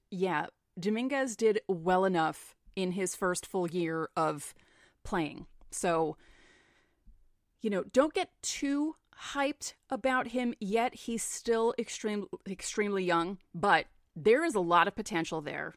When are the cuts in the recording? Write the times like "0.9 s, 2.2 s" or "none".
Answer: none